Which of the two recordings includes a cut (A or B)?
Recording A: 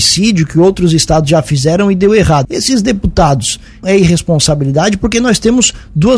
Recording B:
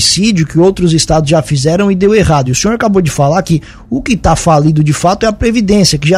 A